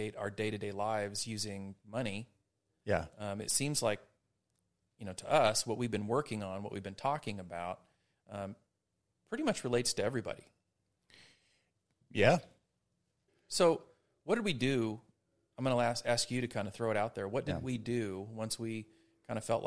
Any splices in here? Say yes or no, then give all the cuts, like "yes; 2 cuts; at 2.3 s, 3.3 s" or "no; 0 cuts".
yes; 1 cut; at 13.3 s